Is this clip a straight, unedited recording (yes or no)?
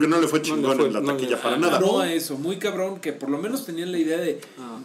no